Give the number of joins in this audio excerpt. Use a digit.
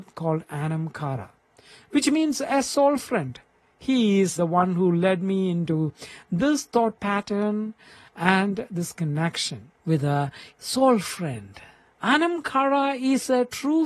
2